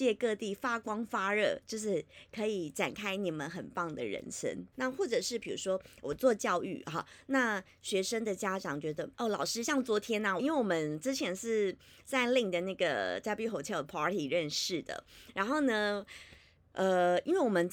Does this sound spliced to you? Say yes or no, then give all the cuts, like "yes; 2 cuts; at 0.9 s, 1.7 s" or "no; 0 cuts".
yes; 3 cuts; at 4.7 s, 9.1 s, 10.4 s